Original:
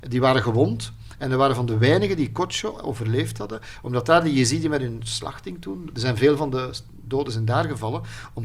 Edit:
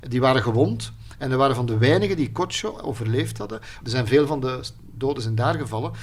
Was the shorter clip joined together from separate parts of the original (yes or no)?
yes